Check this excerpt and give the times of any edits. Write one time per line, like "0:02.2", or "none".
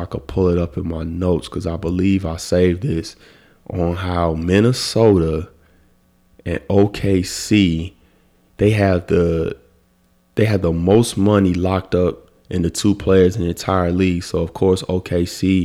none